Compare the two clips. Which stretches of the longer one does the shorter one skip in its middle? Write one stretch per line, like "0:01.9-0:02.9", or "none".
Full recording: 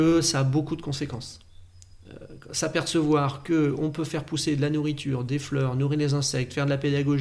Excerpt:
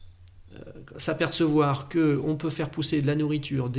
none